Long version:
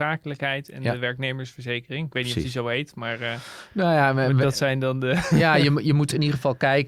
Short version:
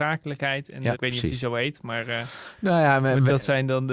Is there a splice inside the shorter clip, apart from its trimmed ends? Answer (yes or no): yes